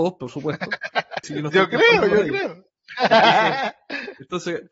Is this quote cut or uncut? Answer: cut